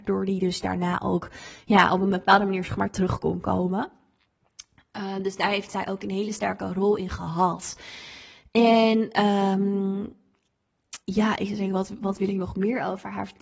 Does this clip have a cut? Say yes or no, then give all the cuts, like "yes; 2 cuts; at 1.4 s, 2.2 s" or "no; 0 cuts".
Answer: yes; 1 cut; at 11.0 s